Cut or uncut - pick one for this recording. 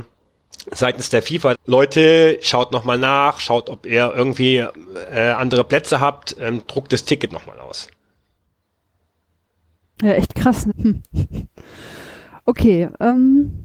cut